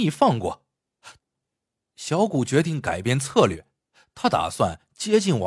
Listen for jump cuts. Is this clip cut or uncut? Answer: cut